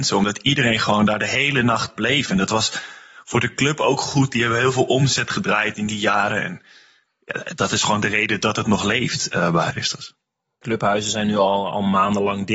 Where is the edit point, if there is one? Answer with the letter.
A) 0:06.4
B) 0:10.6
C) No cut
B